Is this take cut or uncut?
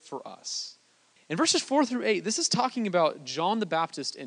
cut